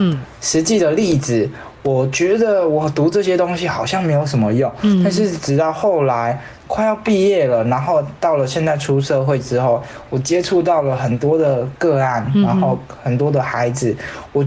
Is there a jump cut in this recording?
no; 0 cuts

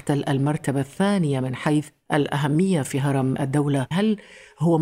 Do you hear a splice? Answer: yes; 1 cut; at 3.9 s

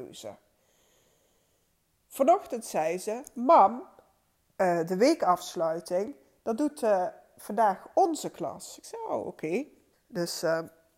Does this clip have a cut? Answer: yes; 1 cut; at 9.9 s

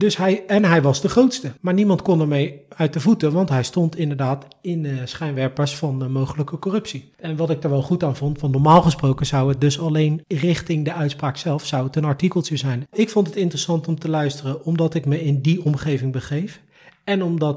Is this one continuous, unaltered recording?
no; 2 cuts; at 1.6 s, 12.9 s

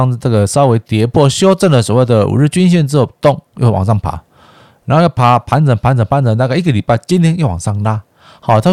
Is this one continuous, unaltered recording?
yes; 0 cuts

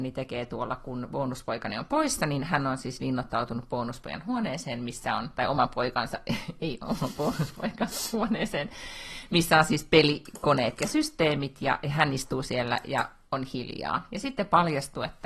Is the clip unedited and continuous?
yes; 0 cuts

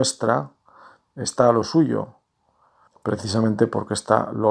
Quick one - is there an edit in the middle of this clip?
yes; 1 cut; at 2.9 s

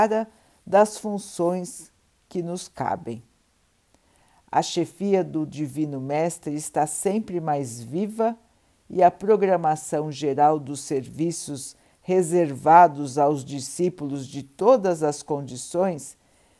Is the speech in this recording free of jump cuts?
yes; 0 cuts

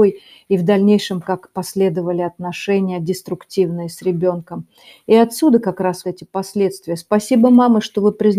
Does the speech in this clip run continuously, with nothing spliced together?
no; 1 cut; at 6.0 s

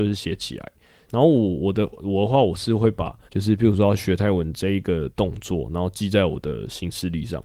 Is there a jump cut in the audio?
yes; 2 cuts; at 1.1 s, 3.3 s

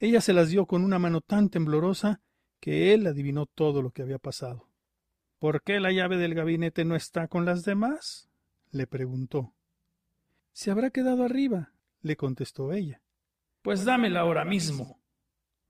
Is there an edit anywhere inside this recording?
yes; 1 cut; at 11.8 s

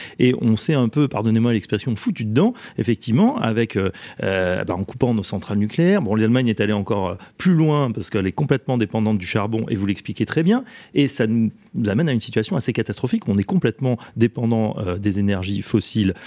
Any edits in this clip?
no; 0 cuts

